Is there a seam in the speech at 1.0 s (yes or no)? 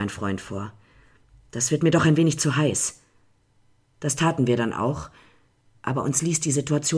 no